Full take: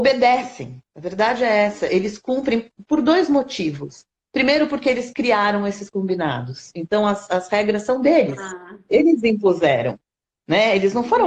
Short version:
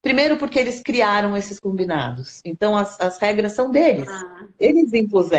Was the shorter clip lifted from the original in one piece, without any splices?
yes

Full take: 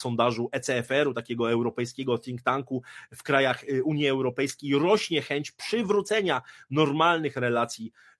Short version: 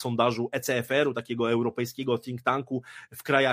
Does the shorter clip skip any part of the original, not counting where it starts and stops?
no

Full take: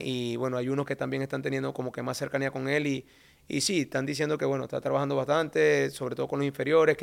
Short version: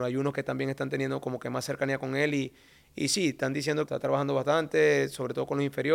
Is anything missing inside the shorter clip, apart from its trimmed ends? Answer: yes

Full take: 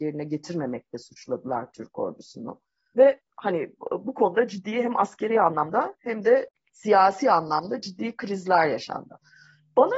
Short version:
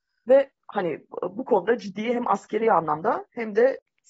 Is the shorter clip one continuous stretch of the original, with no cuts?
yes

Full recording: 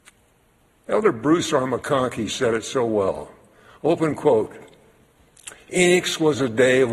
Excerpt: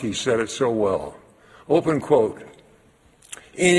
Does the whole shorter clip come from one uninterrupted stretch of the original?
yes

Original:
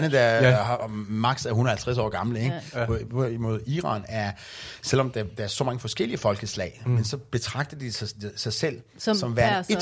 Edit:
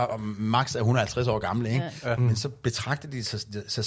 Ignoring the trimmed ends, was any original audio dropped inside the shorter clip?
yes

